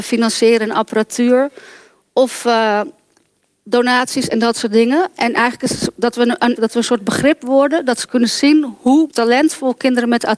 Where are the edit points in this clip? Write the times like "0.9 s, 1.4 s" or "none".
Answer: 6.6 s